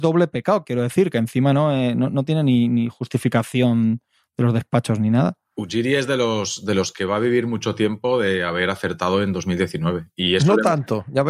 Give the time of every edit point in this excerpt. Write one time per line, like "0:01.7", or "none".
none